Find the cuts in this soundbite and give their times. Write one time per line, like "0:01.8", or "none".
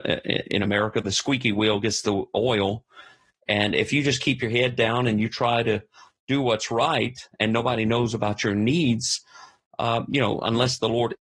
none